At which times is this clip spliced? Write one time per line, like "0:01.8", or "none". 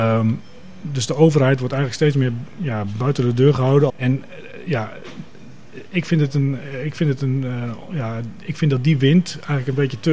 0:03.9